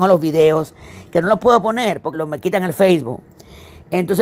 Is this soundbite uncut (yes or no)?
no